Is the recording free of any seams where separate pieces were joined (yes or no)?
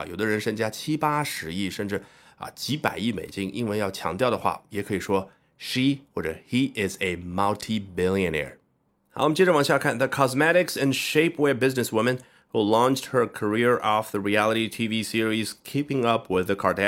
yes